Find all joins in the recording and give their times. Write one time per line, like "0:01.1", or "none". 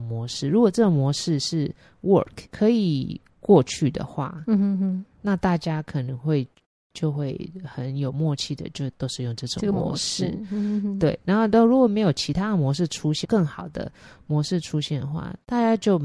0:13.2